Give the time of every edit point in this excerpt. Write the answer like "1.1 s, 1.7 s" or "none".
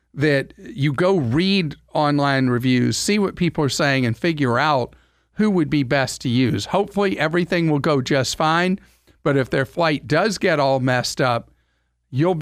none